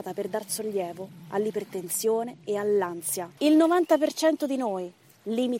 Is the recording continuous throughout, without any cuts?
no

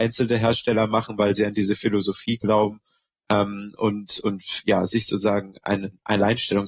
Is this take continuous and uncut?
yes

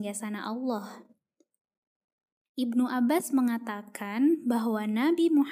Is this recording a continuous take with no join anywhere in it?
yes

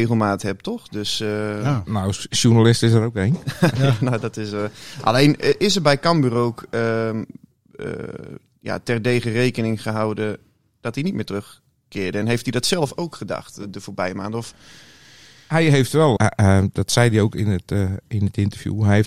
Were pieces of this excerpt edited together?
yes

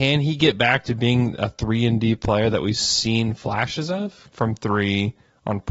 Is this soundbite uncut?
no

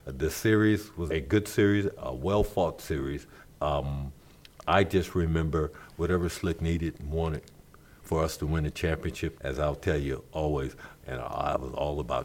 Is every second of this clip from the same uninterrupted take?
no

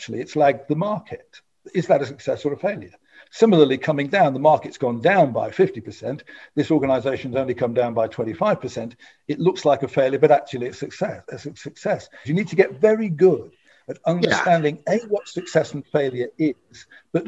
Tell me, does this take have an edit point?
yes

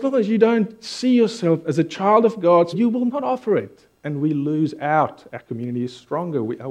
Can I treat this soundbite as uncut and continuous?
no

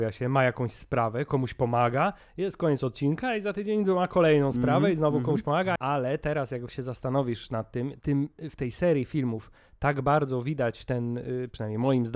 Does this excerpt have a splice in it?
yes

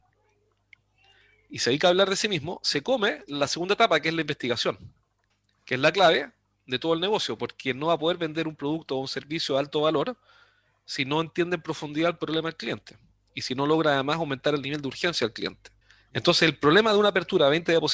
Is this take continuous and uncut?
yes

